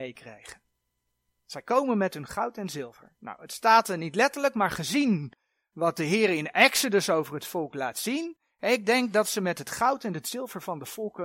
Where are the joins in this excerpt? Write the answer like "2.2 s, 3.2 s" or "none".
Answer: none